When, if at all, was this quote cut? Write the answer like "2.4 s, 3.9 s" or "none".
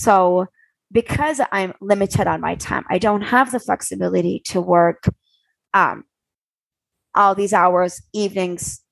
none